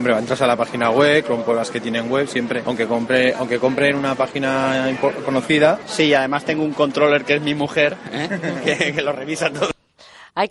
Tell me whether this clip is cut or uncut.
uncut